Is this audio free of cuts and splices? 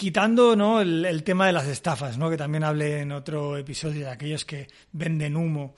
yes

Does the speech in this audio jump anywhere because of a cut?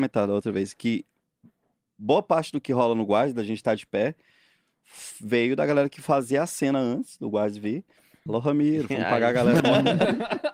yes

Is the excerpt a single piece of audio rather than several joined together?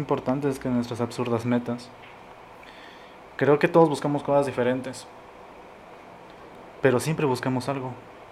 no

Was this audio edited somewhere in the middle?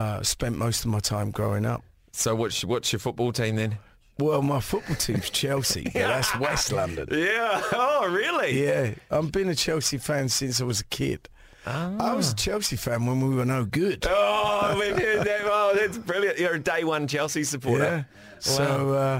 no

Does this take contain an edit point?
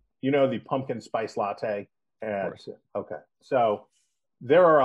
no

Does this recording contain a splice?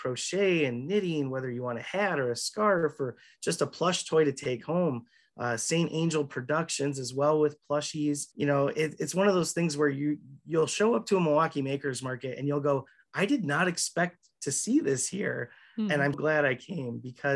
yes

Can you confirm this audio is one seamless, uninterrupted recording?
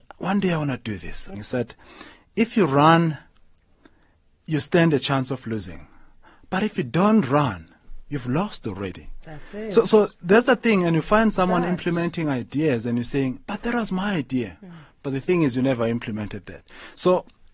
no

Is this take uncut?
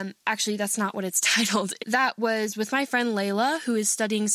no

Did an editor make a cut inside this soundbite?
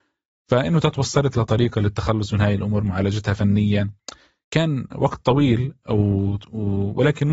no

